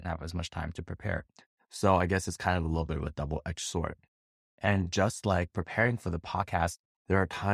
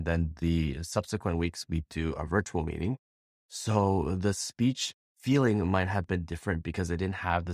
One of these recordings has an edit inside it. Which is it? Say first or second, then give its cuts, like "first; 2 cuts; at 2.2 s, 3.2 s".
first; 1 cut; at 4.4 s